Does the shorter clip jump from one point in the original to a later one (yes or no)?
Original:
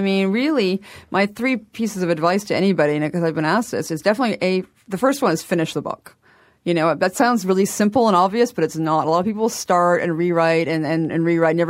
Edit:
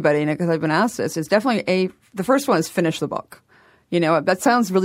no